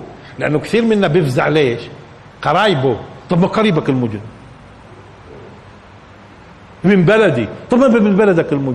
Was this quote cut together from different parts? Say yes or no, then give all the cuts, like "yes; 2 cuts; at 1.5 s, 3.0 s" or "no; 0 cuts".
no; 0 cuts